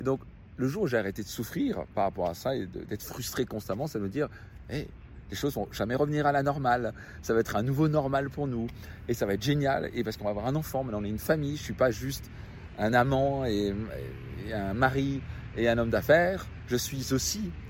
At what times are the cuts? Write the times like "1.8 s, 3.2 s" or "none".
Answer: none